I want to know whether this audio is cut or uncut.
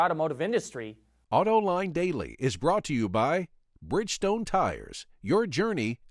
cut